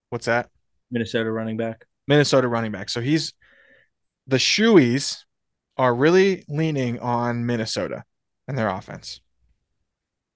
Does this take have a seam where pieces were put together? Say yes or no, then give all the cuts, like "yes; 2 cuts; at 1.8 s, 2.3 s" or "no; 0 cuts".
no; 0 cuts